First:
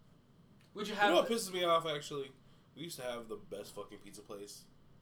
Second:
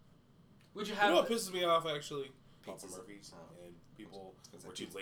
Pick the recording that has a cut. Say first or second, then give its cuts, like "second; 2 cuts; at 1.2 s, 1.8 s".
second; 1 cut; at 2.6 s